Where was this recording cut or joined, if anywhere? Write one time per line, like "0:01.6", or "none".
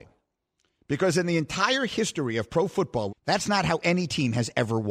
0:03.1